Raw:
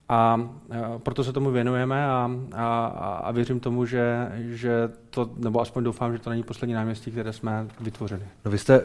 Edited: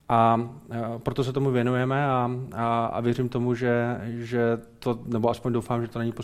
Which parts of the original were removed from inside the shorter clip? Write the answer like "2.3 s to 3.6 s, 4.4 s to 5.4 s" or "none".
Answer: 2.9 s to 3.2 s